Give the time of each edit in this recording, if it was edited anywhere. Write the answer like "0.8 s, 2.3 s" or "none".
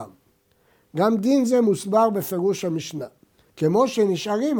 3.5 s